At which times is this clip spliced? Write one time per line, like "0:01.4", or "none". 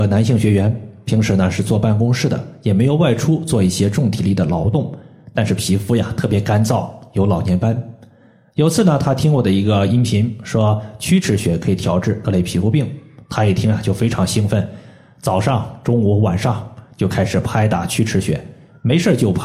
none